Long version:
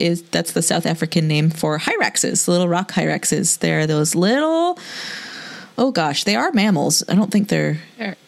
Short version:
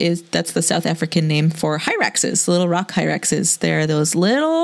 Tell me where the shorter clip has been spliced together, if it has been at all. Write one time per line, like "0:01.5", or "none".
none